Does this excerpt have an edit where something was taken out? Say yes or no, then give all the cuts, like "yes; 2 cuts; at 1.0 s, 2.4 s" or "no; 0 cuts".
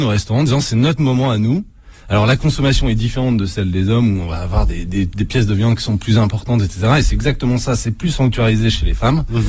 no; 0 cuts